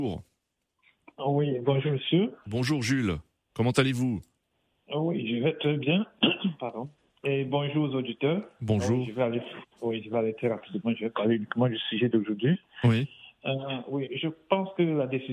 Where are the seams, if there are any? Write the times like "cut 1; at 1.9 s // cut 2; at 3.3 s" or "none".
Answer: none